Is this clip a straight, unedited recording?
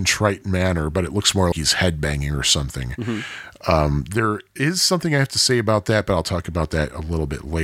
no; 1 cut; at 1.5 s

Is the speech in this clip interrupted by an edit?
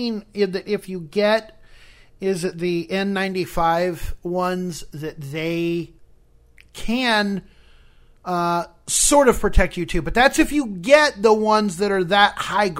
no; 0 cuts

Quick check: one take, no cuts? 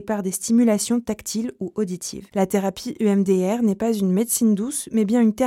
no; 1 cut; at 2.3 s

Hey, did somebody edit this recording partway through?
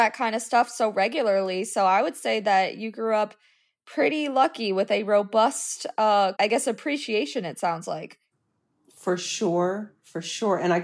yes; 1 cut; at 6.3 s

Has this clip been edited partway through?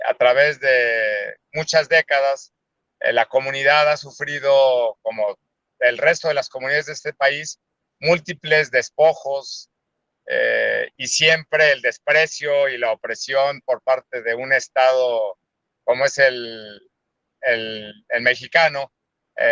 no; 0 cuts

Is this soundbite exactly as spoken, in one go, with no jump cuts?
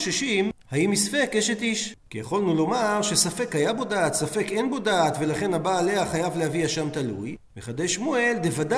yes; 0 cuts

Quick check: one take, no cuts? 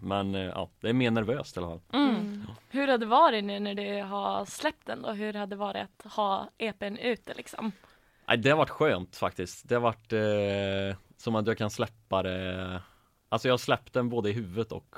yes; 0 cuts

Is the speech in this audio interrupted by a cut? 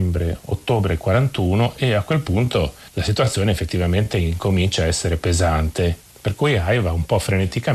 no; 0 cuts

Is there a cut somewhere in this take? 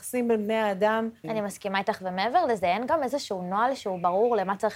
yes; 1 cut; at 1.2 s

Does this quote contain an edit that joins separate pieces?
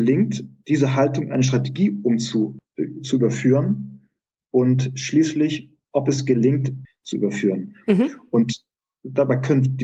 yes; 2 cuts; at 5.8 s, 6.9 s

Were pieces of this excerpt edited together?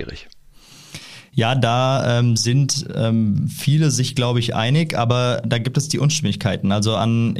no; 0 cuts

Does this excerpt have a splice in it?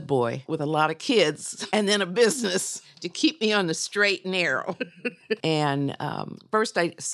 yes; 1 cut; at 5.4 s

